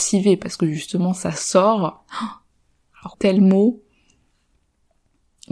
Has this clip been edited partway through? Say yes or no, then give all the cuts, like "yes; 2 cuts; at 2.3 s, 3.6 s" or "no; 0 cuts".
yes; 1 cut; at 3.1 s